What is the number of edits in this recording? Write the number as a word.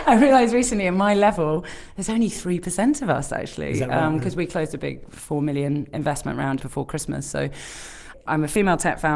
one